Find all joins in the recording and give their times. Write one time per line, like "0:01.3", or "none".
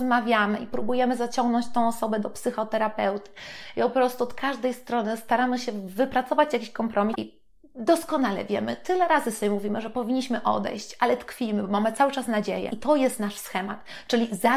0:07.1
0:12.7